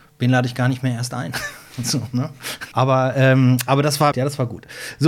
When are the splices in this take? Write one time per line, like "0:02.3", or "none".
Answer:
0:02.7
0:04.1